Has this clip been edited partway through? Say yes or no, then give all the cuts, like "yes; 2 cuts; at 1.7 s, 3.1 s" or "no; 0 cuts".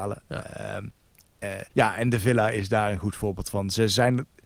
yes; 1 cut; at 1.7 s